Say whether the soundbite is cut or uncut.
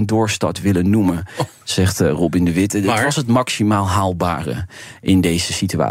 uncut